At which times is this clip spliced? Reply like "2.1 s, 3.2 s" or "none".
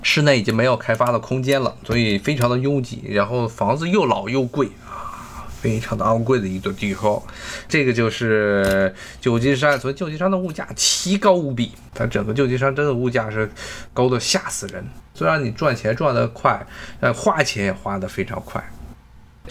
11.9 s, 15.1 s